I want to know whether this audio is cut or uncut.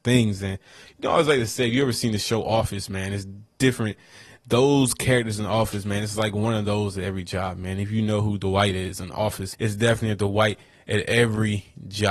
cut